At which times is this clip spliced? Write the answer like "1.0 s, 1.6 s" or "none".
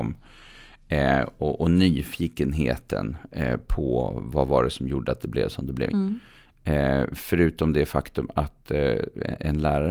5.9 s